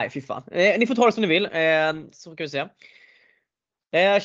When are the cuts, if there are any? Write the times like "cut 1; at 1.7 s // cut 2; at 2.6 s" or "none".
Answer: cut 1; at 2.1 s